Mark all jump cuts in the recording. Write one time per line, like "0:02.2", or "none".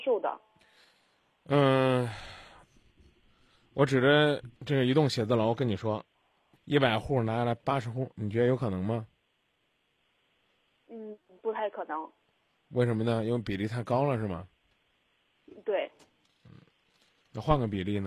0:04.5
0:06.5